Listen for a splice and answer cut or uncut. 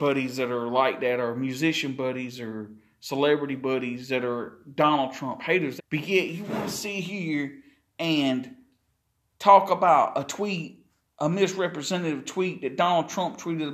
cut